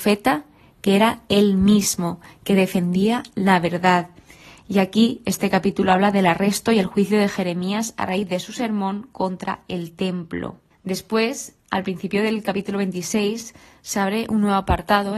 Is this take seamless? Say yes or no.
no